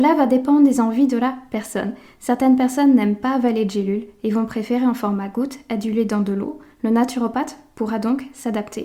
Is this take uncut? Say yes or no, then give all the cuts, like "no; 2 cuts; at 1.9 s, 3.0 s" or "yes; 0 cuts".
yes; 0 cuts